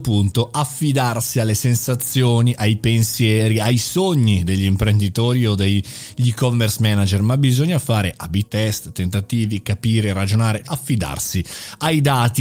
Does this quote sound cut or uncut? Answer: cut